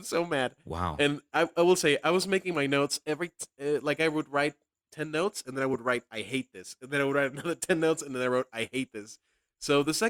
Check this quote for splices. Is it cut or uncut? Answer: uncut